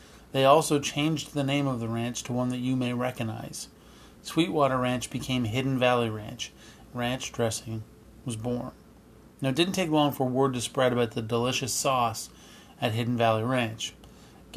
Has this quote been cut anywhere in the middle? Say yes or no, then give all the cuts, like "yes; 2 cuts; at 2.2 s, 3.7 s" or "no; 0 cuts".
yes; 1 cut; at 6.9 s